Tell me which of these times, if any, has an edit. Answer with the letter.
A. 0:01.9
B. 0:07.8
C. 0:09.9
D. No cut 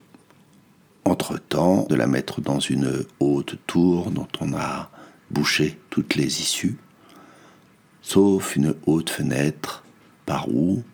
A